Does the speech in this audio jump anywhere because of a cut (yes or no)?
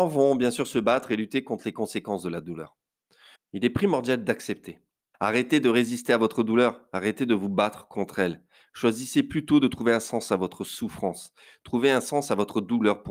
yes